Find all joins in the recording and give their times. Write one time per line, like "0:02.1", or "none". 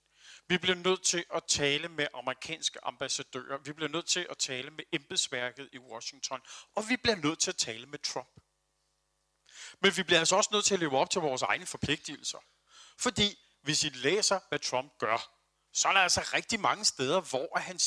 none